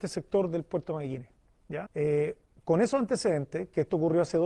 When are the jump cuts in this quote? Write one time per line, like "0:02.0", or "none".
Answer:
0:01.9